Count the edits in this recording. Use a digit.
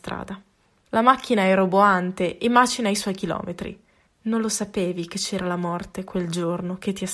1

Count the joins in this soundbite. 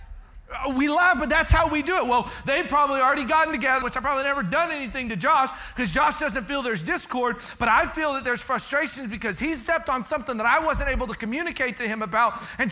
1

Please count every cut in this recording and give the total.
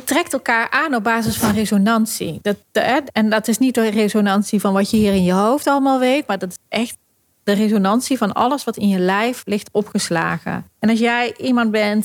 1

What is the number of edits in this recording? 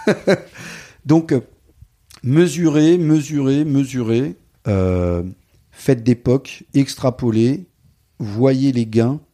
1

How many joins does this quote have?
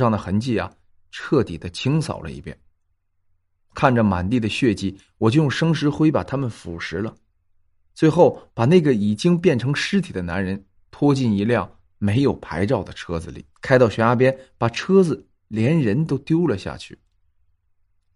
2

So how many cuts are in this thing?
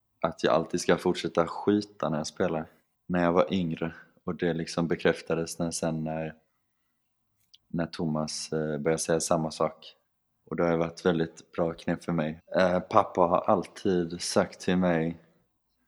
1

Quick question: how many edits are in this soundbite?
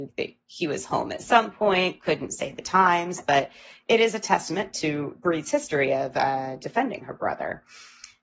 0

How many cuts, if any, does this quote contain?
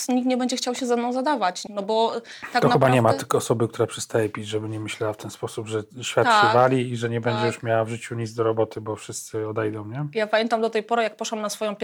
1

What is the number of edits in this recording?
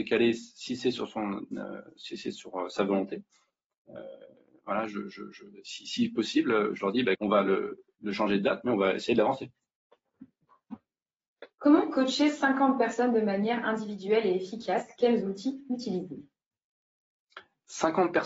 2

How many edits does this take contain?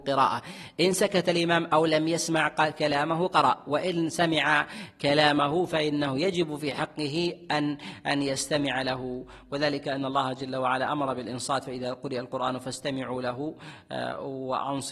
0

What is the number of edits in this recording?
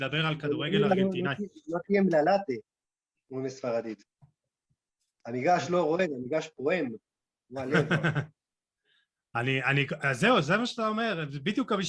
0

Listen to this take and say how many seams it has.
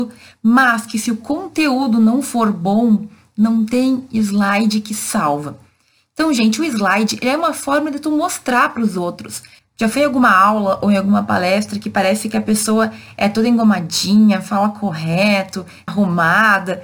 2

